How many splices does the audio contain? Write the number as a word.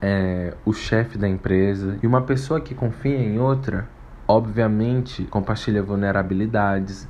two